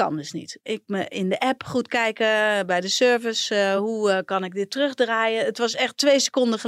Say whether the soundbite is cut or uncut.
uncut